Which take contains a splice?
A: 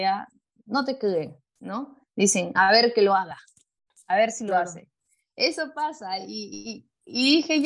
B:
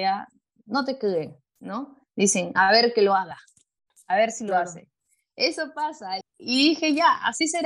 B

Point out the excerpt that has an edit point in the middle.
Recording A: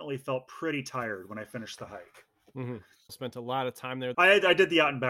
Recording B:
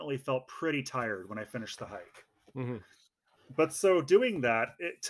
A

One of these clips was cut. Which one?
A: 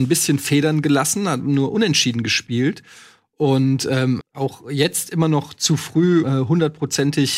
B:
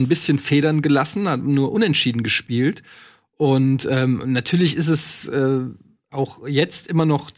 A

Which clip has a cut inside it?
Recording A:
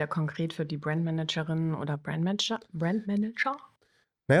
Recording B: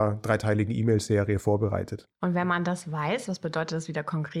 B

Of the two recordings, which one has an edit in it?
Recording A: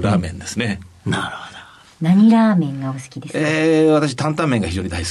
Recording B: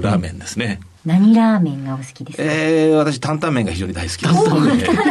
B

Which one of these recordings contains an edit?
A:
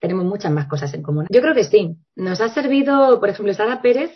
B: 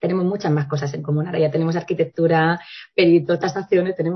A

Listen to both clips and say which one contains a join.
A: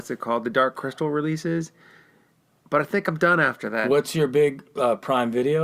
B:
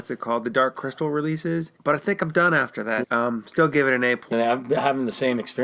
B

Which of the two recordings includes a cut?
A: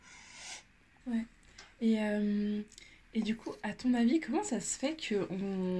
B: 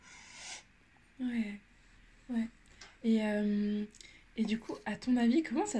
A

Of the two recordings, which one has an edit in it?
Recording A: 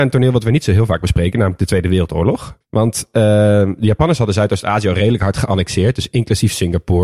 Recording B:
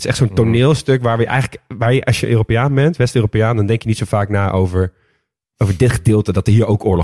A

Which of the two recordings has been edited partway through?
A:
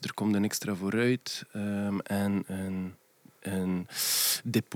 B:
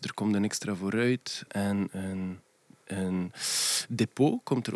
B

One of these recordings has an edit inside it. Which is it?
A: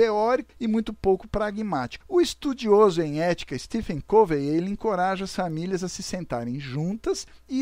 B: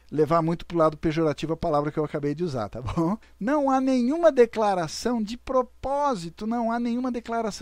A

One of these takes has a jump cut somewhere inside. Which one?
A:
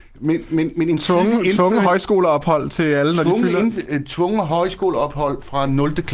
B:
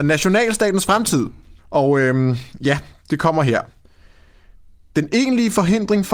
B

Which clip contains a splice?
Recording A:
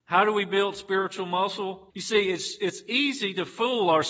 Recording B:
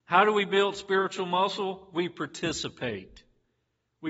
A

